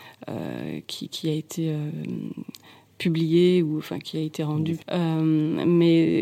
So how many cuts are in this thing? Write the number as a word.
one